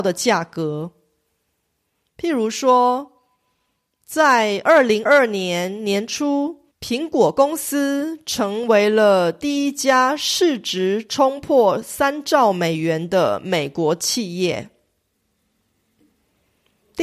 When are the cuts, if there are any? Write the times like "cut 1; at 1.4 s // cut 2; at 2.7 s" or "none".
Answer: cut 1; at 5.1 s // cut 2; at 6.7 s